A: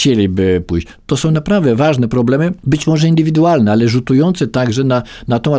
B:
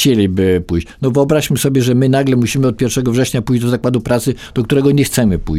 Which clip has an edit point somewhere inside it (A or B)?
A